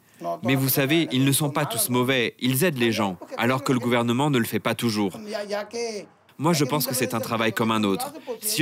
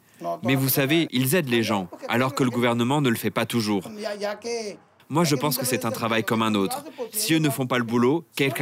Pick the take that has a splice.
second; 1 cut; at 1.1 s

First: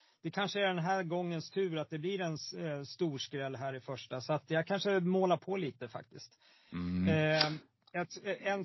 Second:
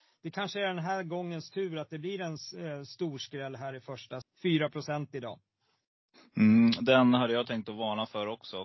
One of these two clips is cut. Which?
second; 1 cut; at 4.2 s

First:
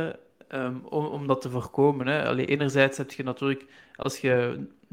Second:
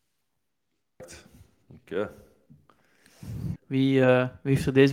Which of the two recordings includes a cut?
second; 1 cut; at 3.6 s

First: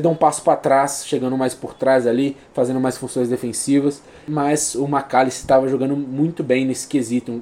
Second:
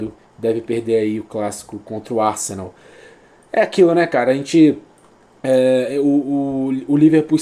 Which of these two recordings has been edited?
first; 1 cut; at 4.2 s

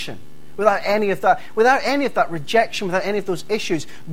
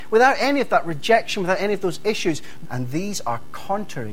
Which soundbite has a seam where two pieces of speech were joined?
second; 1 cut; at 2.6 s

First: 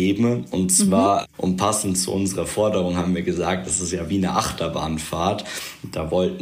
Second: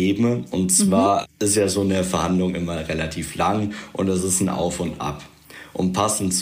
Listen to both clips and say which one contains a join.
first; 1 cut; at 1.3 s

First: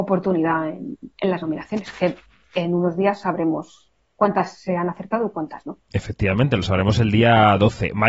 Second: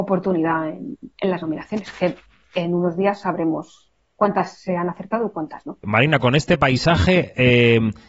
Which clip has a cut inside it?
second; 1 cut; at 5.8 s

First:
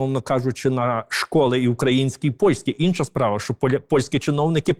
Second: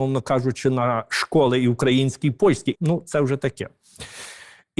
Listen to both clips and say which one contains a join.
second; 1 cut; at 2.7 s

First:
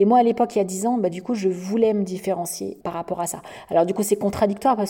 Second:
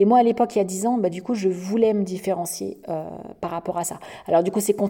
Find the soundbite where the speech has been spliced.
first; 1 cut; at 2.8 s

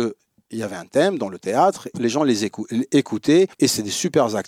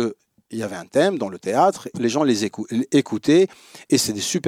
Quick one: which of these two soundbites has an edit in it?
first; 1 cut; at 3.5 s

